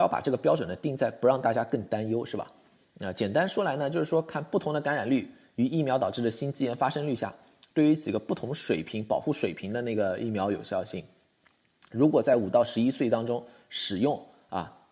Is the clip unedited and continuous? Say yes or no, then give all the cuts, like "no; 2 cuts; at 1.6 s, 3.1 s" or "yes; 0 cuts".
no; 1 cut; at 2.8 s